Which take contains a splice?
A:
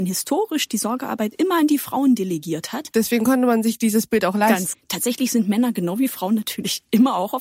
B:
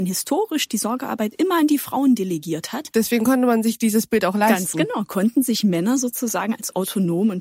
A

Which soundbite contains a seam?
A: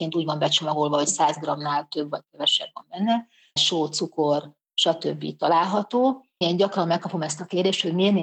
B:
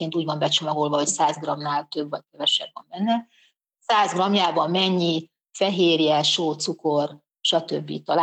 A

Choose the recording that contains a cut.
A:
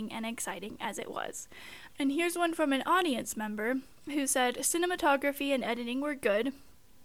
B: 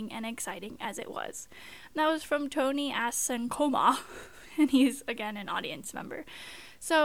A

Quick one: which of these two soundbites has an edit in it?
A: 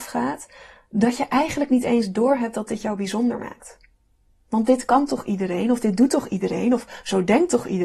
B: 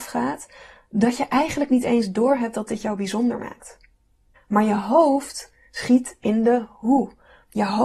B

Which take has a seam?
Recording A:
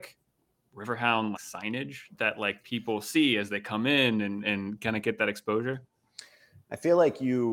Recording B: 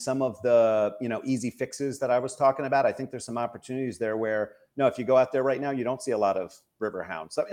A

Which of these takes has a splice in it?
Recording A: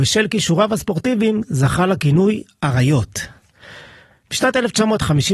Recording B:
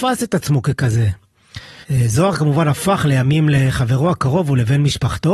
B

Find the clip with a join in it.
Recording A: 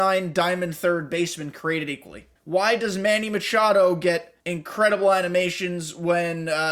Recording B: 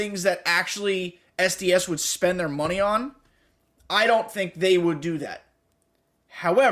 A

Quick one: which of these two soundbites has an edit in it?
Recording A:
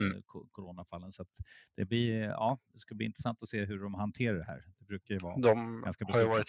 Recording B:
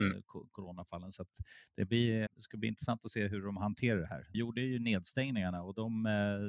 B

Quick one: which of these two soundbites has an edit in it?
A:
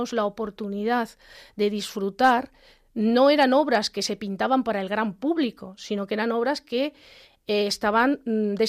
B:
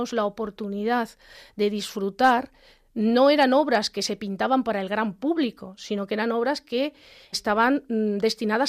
B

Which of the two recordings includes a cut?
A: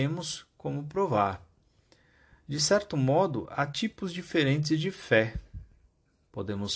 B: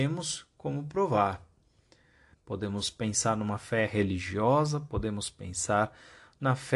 B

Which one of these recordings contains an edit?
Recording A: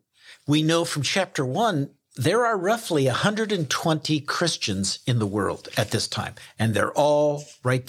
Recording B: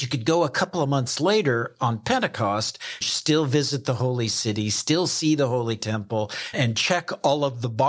B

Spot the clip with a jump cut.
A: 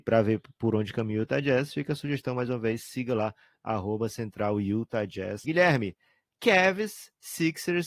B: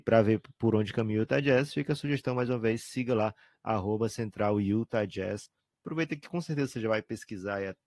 A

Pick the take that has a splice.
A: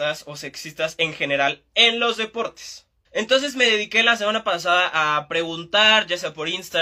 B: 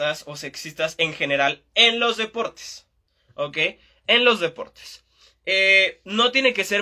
A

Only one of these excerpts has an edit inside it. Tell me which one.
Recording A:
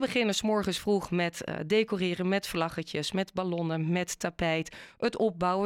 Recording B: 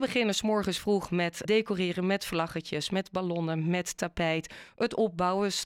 B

